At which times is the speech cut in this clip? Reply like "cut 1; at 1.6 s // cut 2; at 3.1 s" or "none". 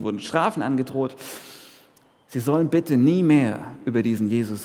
none